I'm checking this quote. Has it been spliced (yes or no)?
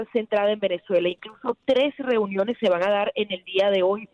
no